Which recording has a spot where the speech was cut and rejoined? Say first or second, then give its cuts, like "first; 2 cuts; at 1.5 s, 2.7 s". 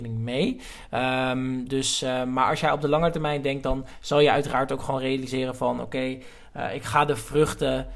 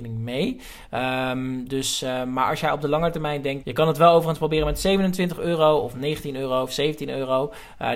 second; 1 cut; at 3.6 s